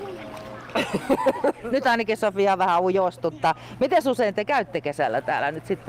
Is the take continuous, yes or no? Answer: yes